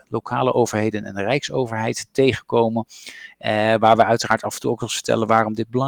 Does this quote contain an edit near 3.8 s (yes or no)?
no